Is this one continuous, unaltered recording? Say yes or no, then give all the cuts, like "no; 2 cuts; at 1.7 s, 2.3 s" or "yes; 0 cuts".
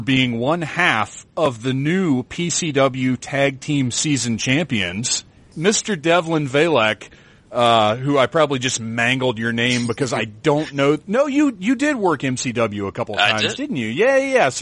yes; 0 cuts